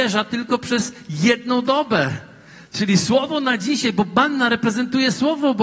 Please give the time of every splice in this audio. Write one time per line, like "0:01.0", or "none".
none